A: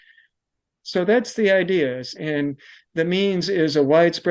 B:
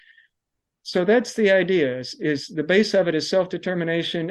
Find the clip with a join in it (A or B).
A